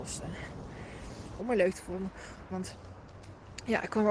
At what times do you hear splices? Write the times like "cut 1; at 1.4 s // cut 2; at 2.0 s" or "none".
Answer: cut 1; at 1.4 s // cut 2; at 2.5 s